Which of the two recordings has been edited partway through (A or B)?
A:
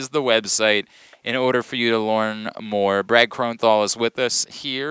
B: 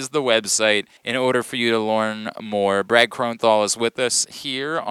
B